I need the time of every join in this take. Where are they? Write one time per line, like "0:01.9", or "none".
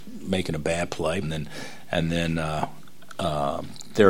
0:01.2